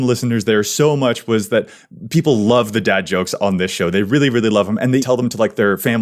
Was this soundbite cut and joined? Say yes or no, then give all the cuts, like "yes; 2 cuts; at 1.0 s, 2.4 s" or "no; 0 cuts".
yes; 1 cut; at 5.0 s